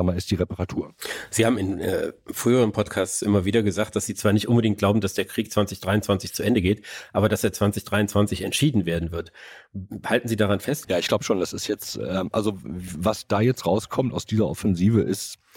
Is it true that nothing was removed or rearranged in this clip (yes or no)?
no